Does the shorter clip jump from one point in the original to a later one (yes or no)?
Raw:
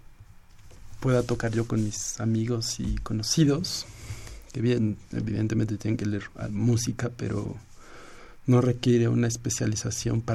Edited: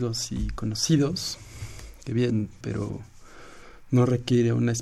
yes